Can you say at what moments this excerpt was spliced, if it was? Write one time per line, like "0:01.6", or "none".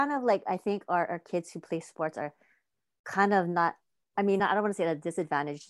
none